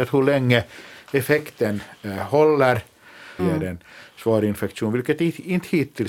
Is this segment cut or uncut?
cut